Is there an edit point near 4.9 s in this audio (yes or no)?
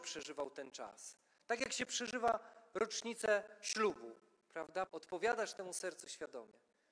yes